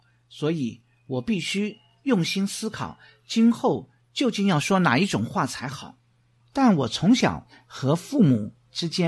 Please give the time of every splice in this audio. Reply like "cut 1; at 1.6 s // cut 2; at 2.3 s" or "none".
cut 1; at 6.4 s